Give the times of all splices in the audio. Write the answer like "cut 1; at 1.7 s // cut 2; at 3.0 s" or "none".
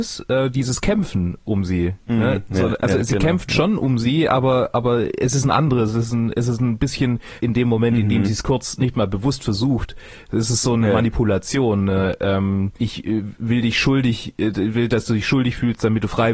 cut 1; at 7.4 s

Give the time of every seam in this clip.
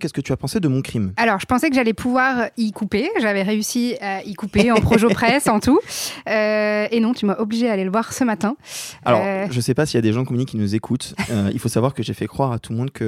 none

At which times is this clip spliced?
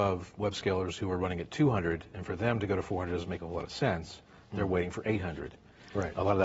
none

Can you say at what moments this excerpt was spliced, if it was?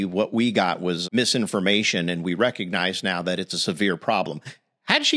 cut 1; at 1.0 s

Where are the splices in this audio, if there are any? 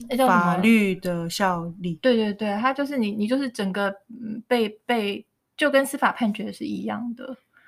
none

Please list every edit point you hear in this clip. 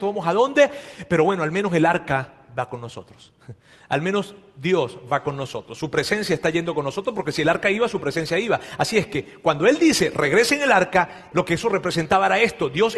cut 1; at 11.3 s

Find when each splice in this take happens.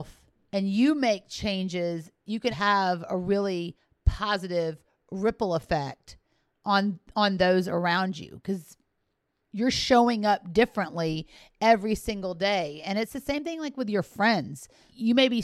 cut 1; at 2.5 s

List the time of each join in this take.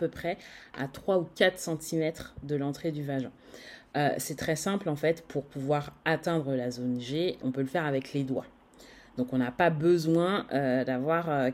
cut 1; at 7.4 s

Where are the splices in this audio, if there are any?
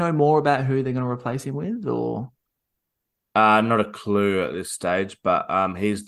none

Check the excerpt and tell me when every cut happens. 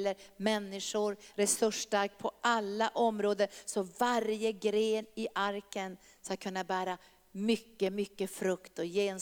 cut 1; at 1.3 s

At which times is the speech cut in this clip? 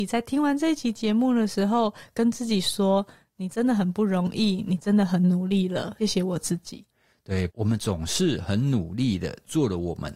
cut 1; at 6.0 s // cut 2; at 7.5 s

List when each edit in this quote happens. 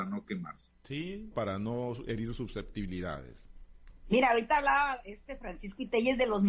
cut 1; at 1.3 s

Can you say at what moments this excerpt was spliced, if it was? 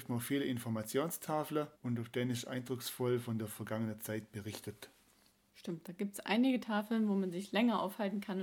cut 1; at 1.7 s

